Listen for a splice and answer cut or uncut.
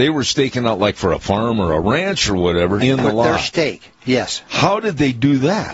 cut